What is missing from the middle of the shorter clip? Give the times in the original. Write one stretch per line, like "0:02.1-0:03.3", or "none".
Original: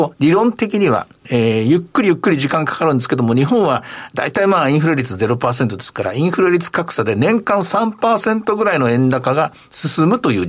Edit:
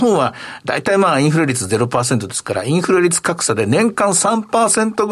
none